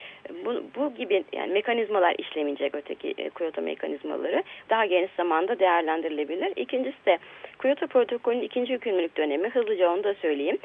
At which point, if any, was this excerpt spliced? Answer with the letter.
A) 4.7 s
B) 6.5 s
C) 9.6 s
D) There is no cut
A